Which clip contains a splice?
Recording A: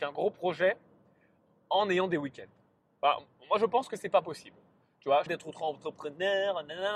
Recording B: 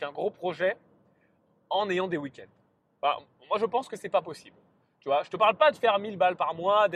A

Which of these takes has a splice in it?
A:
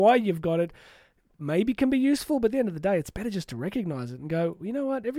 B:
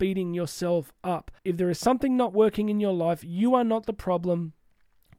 B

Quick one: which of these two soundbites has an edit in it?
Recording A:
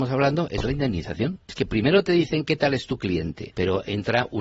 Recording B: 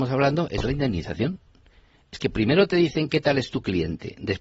A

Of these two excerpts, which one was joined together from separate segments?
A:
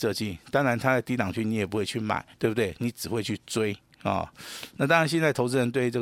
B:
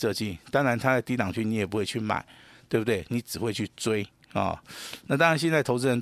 A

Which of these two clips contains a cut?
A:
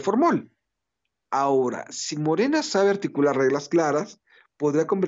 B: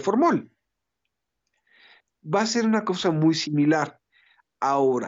A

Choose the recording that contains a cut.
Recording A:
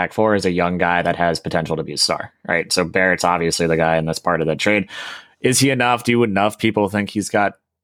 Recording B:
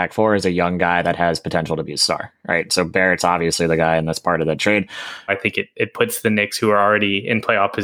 B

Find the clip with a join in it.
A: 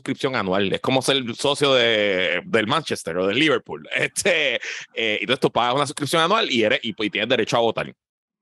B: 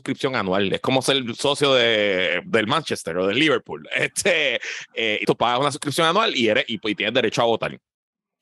B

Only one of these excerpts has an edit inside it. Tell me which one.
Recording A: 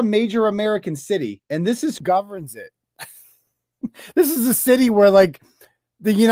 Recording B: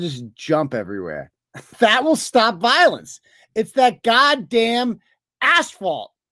A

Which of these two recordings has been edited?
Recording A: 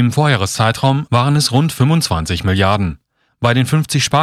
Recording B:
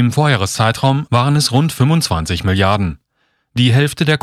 A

